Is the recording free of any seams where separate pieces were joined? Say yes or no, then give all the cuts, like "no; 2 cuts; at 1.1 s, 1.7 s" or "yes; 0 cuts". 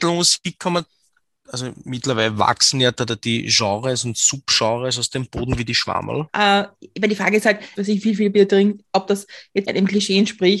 no; 3 cuts; at 6.3 s, 7.8 s, 9.6 s